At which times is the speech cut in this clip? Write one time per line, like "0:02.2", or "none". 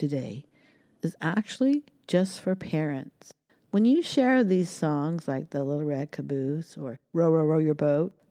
none